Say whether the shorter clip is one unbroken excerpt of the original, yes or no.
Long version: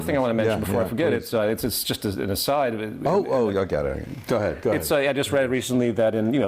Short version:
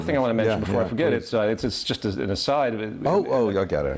yes